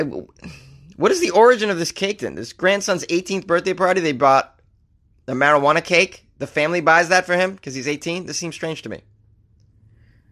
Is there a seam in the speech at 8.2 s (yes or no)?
no